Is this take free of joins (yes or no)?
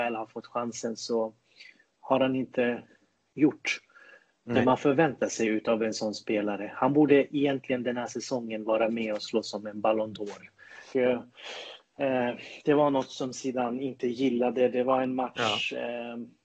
no